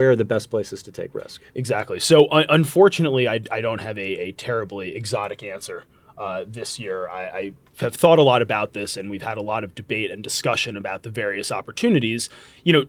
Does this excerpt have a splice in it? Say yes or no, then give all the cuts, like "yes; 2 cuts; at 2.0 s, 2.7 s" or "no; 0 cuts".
no; 0 cuts